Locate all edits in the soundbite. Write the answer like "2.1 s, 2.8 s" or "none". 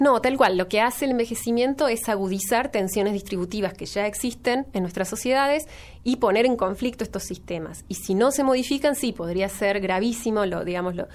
none